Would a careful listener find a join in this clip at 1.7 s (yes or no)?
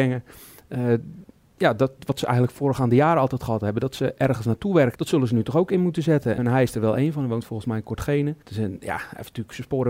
no